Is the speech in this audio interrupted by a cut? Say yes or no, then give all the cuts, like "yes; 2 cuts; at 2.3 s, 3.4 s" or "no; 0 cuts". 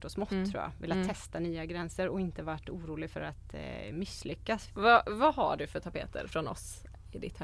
yes; 2 cuts; at 4.7 s, 6.3 s